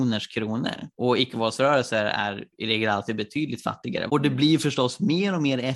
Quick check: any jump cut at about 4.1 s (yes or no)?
yes